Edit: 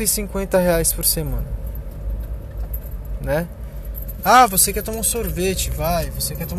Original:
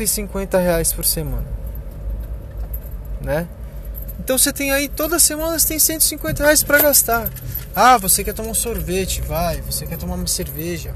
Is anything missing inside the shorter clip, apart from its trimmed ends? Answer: yes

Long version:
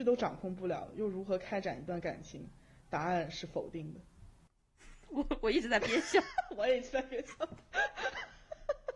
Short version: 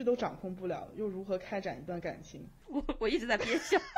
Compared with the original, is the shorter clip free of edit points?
no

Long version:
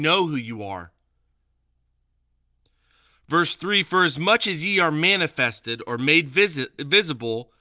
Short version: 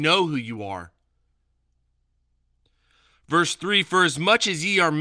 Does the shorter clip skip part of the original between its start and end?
no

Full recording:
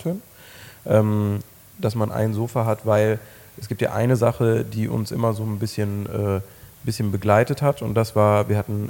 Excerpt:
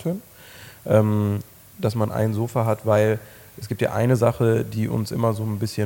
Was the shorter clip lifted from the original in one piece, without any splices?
yes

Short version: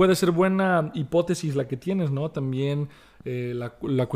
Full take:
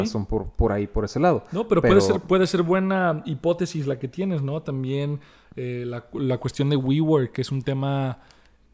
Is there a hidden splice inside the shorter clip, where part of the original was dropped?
no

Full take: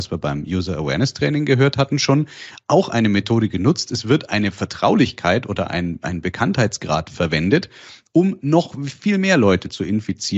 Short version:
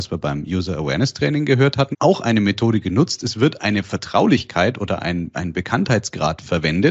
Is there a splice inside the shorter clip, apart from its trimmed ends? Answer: yes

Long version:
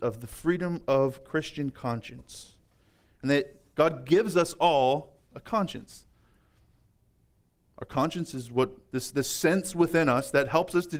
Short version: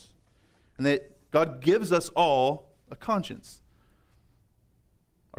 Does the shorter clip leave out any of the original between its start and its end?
no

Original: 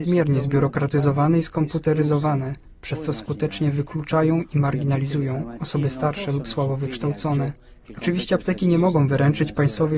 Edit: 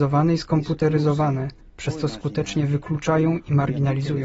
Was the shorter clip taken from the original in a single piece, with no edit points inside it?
yes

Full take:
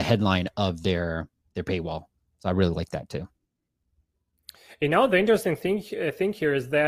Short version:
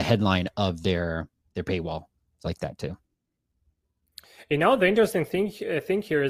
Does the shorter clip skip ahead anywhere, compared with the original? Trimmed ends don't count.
yes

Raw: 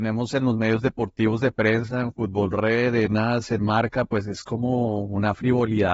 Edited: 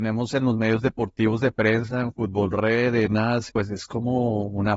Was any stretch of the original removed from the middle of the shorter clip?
yes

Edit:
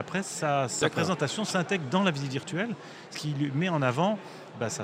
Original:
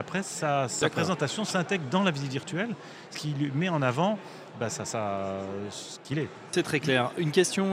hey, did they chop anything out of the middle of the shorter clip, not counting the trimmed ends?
no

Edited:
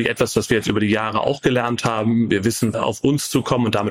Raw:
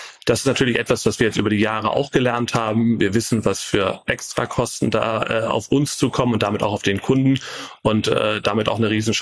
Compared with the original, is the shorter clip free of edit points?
no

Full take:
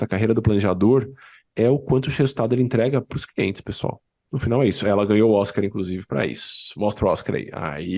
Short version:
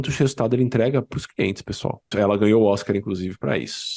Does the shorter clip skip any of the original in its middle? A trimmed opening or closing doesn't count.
yes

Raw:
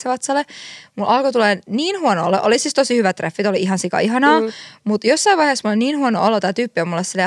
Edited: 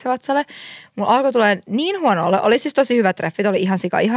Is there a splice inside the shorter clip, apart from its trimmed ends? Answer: no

